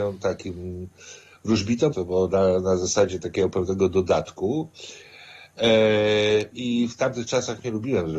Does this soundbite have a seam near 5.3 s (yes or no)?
no